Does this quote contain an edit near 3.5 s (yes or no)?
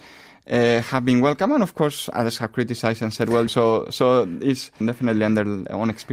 yes